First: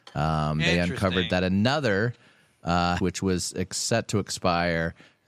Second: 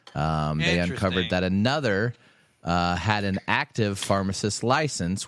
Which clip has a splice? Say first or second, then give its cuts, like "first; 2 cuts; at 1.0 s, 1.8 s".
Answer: first; 1 cut; at 3.0 s